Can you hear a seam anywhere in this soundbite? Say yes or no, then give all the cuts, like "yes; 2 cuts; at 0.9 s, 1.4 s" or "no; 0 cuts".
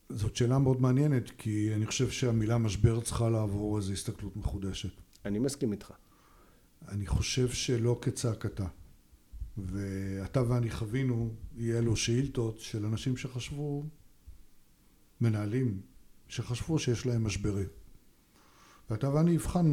no; 0 cuts